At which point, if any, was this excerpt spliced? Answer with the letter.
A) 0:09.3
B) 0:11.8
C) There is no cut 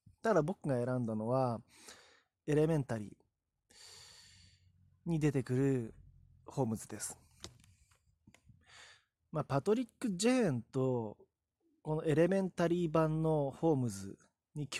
C